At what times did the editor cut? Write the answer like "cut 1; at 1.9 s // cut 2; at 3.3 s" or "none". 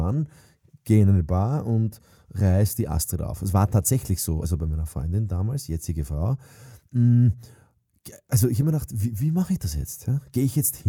none